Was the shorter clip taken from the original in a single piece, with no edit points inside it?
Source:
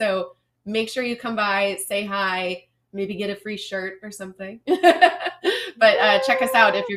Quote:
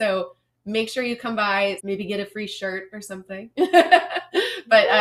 no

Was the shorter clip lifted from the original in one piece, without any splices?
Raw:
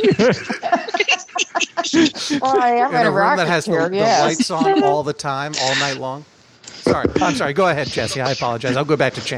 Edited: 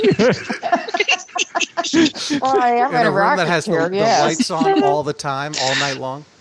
yes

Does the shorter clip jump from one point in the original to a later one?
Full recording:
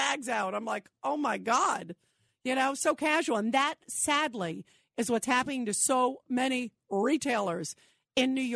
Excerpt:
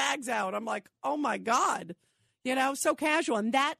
no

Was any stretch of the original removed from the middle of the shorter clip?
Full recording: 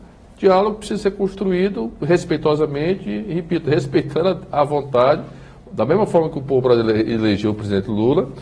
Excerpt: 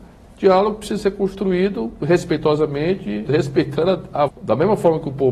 yes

